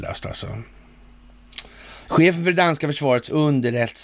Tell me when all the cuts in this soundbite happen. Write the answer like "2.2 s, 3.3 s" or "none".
2.1 s